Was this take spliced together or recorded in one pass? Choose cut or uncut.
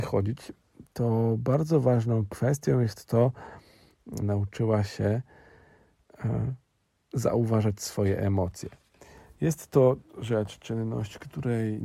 cut